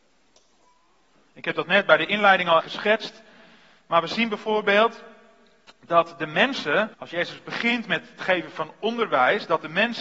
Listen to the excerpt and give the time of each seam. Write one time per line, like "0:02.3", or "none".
0:02.6
0:06.9